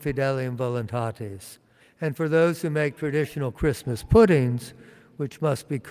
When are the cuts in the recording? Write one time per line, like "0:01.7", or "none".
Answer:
0:01.8